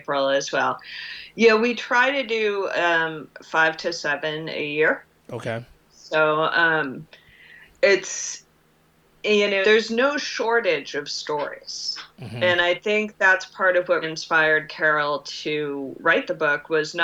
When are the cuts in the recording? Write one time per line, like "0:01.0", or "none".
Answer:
0:09.6
0:14.0